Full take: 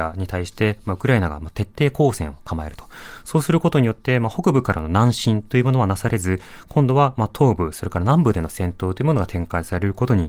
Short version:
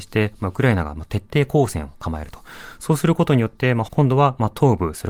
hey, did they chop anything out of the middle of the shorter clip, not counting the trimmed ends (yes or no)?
yes